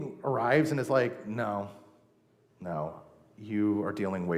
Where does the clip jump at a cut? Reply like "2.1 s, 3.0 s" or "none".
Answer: 2.5 s